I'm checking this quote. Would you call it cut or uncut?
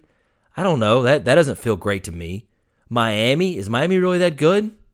uncut